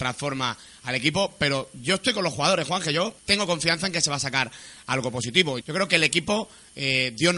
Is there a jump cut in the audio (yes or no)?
yes